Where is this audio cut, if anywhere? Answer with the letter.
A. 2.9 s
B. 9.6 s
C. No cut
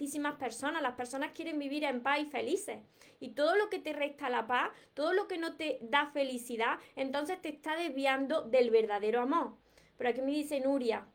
C